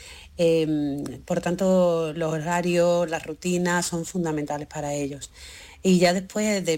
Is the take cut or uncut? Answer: uncut